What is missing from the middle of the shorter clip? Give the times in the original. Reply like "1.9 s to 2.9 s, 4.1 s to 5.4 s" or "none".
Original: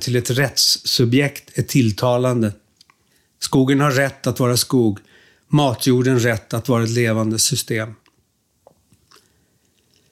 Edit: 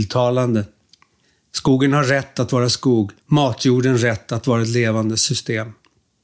5.1 s to 5.4 s